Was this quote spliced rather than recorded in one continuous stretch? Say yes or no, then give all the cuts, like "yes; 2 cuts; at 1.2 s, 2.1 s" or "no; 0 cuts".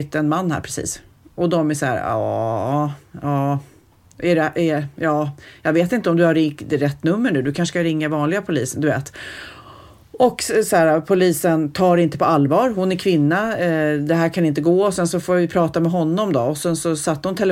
no; 0 cuts